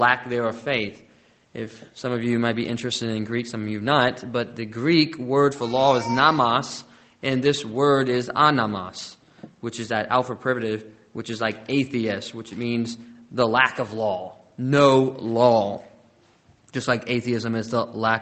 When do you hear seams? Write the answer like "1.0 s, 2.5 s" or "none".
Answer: none